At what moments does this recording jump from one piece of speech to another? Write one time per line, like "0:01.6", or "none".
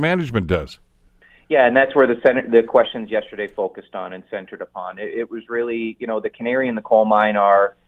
none